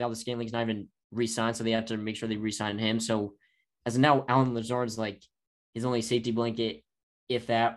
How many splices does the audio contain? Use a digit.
0